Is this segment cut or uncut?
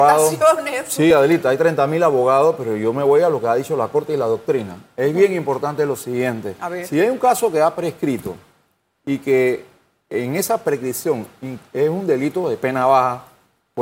uncut